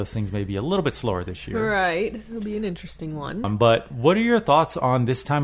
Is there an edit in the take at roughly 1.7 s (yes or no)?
no